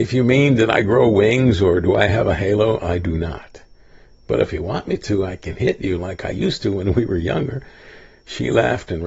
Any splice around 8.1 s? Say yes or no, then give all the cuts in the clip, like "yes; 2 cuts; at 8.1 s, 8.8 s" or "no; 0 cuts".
no; 0 cuts